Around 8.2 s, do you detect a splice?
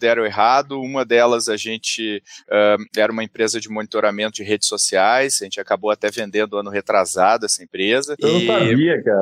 yes; 1 cut; at 8.2 s

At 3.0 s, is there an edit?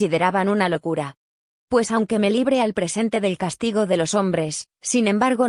no; 1 cut; at 1.6 s

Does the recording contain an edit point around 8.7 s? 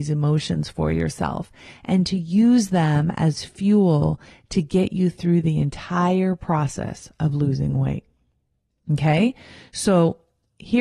yes; 1 cut; at 8.7 s

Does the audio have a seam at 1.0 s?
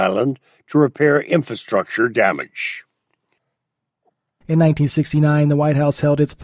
no; 1 cut; at 4.4 s

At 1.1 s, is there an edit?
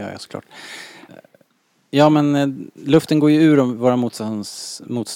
yes; 1 cut; at 1.1 s

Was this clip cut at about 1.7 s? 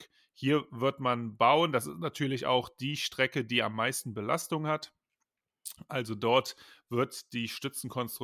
no; 0 cuts

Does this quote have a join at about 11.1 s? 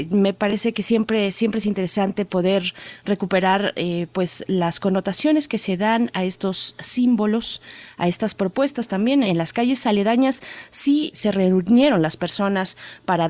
yes; 2 cuts; at 9.2 s, 11.1 s

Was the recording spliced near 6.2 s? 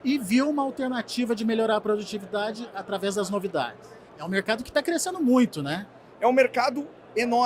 no; 1 cut; at 4.1 s

